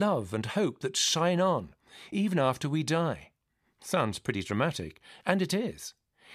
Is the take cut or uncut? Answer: uncut